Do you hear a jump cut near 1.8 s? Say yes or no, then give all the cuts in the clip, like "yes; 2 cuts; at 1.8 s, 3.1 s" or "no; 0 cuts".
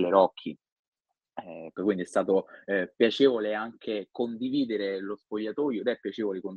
yes; 1 cut; at 1.8 s